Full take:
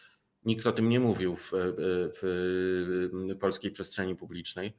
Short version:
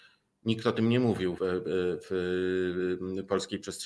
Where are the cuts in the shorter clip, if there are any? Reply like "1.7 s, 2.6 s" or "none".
1.4 s